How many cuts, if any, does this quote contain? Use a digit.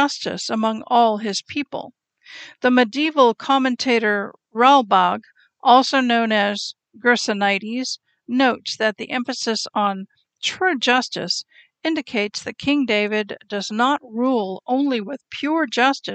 0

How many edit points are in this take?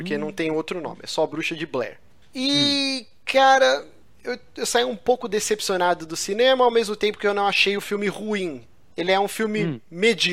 0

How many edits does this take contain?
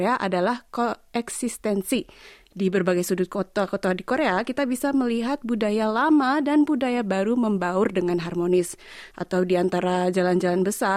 1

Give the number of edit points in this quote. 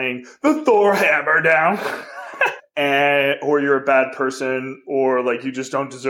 1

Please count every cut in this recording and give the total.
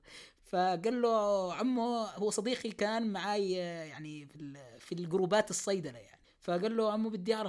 0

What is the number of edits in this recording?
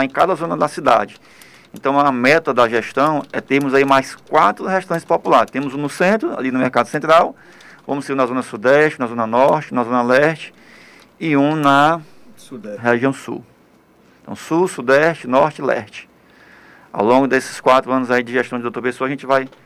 0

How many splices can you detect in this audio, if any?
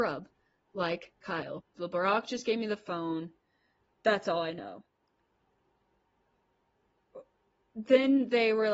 1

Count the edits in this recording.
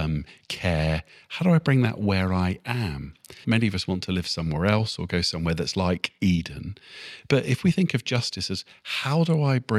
1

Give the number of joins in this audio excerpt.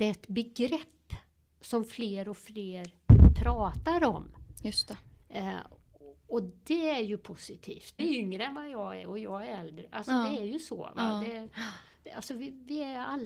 2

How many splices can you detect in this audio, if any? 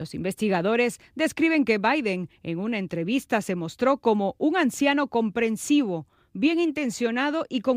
0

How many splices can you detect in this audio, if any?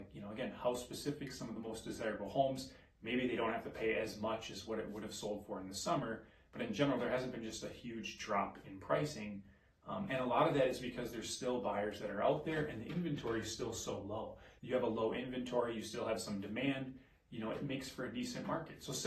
1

